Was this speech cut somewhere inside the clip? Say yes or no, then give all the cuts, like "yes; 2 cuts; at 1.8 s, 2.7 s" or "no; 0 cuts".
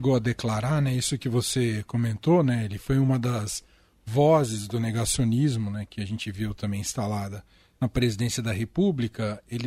no; 0 cuts